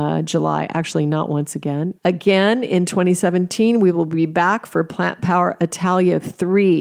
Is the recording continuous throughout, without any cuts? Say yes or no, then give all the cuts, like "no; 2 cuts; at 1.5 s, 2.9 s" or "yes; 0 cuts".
no; 1 cut; at 2.0 s